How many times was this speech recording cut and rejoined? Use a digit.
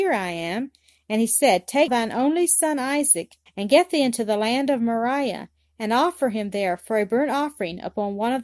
2